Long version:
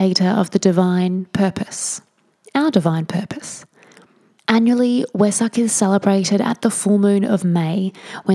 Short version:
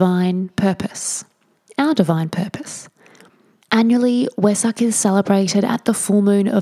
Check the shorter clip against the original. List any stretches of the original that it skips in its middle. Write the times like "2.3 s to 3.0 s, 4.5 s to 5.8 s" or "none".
none